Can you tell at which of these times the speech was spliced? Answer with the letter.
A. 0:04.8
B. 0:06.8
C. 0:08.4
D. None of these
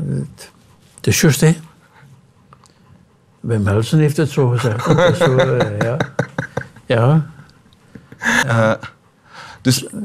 C